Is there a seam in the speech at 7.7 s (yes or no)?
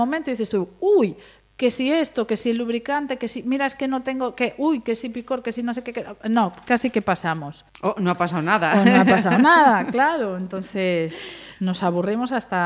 yes